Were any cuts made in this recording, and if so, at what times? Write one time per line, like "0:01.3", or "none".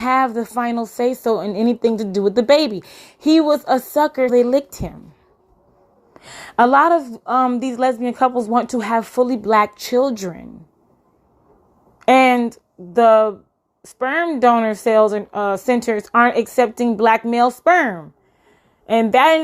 0:04.3